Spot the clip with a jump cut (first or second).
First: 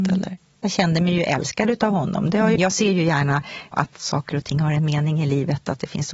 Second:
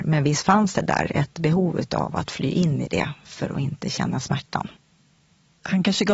first